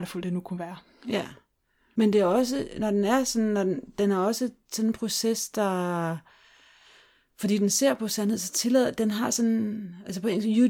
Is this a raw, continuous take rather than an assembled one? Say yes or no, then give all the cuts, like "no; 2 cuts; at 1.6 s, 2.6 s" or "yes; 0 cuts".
yes; 0 cuts